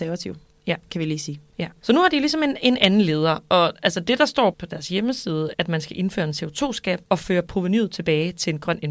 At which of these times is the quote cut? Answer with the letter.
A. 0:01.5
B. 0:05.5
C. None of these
B